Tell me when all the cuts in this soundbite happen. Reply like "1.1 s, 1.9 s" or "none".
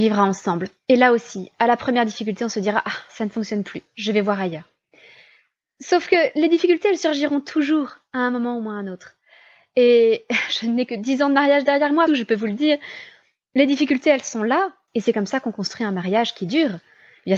12.1 s, 14.9 s